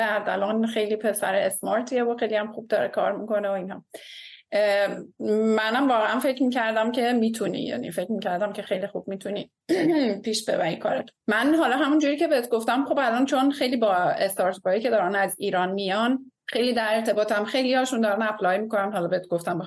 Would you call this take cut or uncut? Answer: cut